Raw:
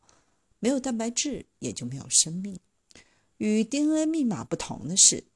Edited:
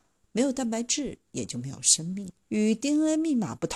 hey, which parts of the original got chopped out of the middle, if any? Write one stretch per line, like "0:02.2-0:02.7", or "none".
0:02.7-0:03.3